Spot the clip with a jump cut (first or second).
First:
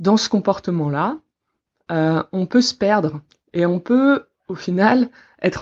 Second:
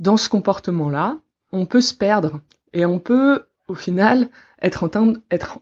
second